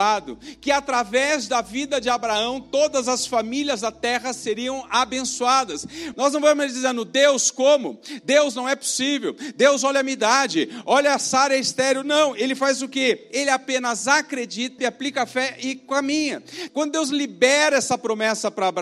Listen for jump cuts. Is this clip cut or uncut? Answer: cut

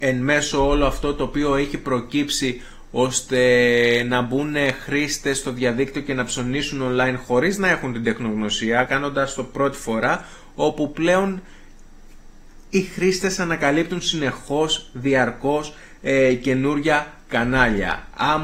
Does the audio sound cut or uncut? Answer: uncut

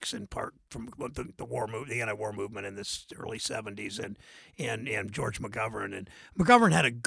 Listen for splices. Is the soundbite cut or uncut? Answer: uncut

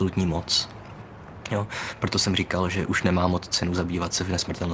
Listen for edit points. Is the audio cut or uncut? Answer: uncut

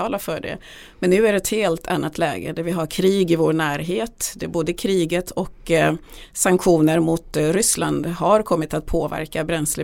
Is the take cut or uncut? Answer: uncut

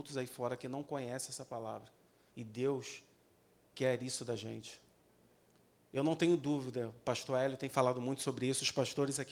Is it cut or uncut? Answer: cut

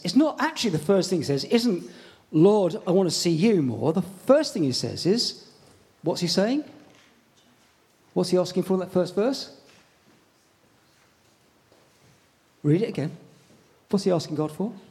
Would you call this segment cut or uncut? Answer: uncut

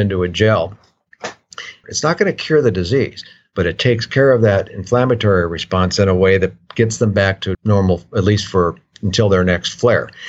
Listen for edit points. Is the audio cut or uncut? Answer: cut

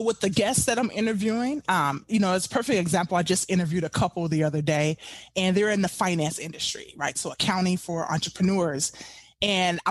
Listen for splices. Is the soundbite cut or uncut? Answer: uncut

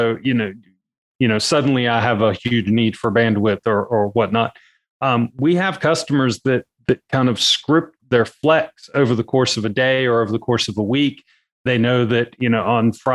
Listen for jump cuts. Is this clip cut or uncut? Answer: cut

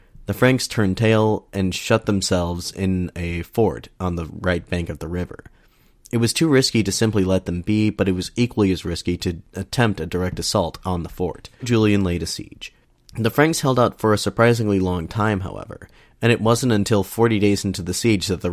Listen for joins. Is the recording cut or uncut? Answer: cut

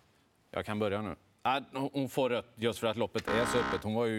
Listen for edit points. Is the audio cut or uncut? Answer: uncut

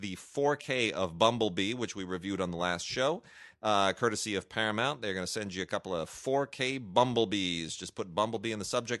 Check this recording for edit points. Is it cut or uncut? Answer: uncut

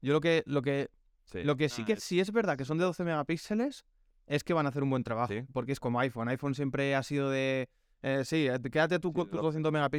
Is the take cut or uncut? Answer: cut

